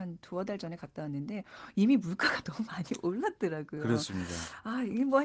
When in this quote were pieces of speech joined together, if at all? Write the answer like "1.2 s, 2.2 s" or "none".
none